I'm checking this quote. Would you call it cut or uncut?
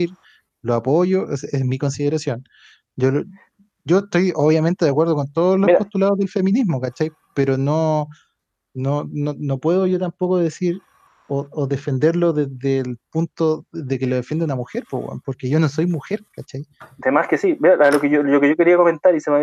uncut